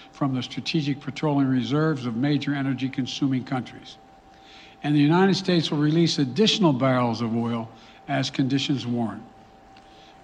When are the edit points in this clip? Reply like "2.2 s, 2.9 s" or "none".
none